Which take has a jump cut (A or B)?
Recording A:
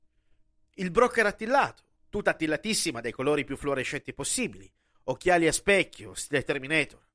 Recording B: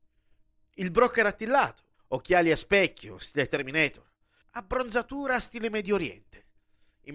B